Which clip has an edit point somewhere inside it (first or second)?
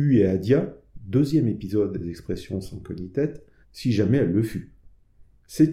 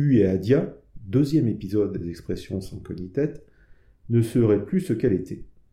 first